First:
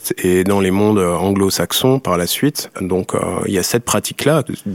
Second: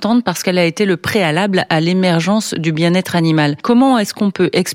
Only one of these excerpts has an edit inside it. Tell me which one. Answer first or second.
first